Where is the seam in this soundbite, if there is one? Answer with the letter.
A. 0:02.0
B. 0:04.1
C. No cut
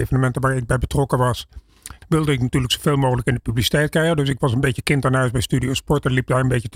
A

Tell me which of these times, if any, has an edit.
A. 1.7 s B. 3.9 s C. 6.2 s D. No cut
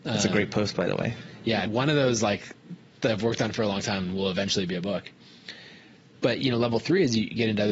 A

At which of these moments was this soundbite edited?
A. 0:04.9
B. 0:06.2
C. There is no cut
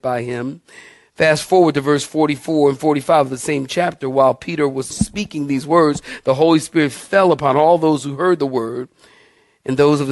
A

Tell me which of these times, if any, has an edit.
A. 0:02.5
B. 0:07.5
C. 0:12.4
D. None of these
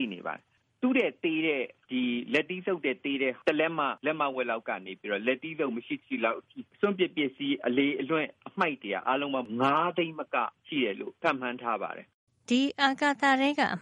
D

